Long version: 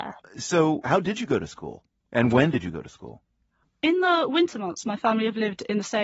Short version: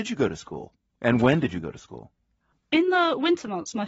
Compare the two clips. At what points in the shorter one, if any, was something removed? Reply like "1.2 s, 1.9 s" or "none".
none

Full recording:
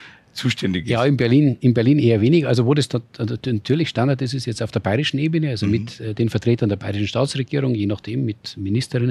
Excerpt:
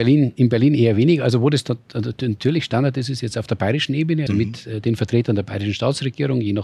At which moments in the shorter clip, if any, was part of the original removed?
4.3 s

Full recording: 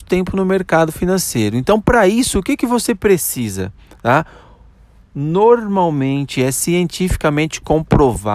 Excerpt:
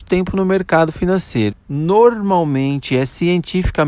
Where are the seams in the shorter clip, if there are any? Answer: 1.5 s

